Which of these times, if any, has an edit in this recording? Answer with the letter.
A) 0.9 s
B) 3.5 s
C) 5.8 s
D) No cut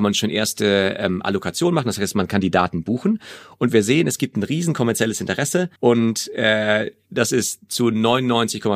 C